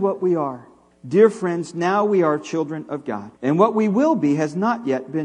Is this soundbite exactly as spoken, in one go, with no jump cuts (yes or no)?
no